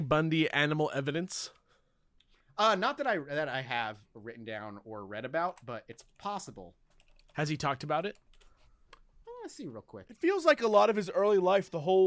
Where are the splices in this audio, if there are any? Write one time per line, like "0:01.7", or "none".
none